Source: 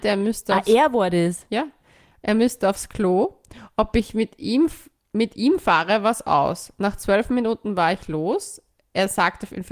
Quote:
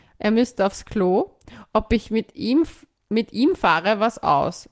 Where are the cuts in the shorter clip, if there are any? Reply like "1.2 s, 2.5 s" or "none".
none

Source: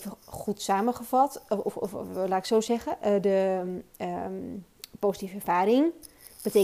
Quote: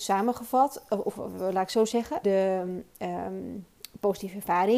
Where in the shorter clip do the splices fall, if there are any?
1.1 s, 2.2 s

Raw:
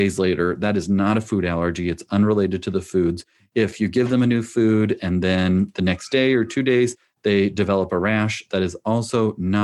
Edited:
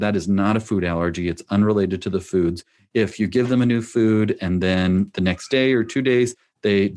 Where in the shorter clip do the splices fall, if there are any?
none

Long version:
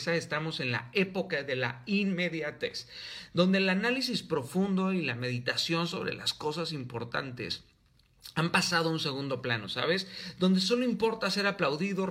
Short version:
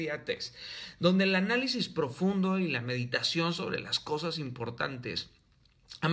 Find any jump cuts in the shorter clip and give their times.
none

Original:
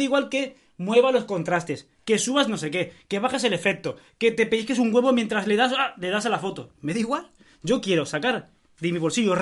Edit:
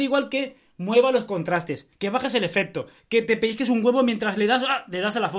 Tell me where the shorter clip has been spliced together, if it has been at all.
1.9 s

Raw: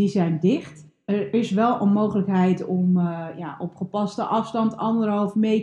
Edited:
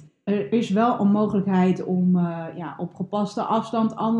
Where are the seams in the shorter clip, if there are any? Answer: none

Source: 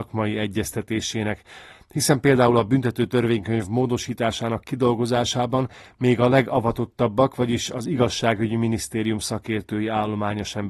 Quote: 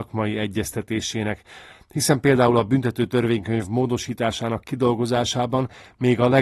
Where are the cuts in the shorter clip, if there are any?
none

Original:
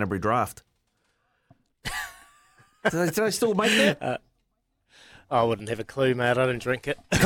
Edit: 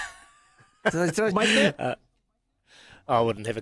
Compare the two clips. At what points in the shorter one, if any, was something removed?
1.3 s

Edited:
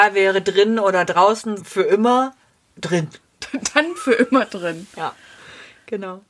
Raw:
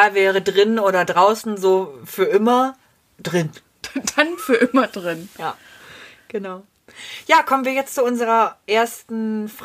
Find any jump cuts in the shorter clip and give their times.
1.6 s

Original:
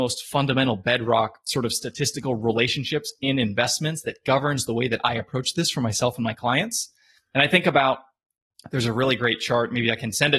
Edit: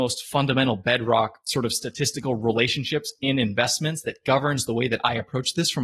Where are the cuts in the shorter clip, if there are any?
none

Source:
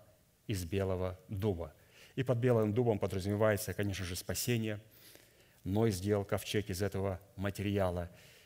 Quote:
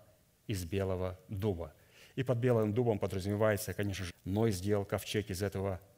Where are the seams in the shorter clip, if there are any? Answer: 4.1 s

